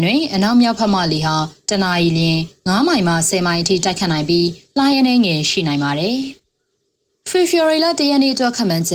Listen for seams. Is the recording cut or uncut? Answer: cut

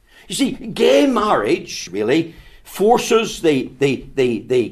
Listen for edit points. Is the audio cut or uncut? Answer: cut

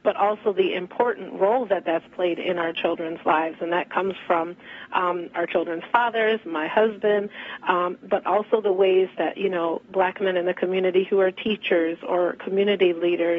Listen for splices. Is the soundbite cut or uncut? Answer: uncut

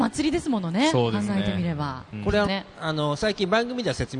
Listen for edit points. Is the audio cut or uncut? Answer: cut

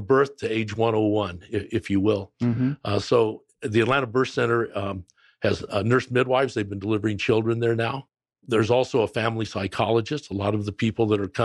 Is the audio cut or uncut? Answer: uncut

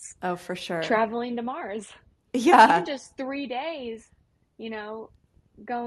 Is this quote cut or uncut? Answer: uncut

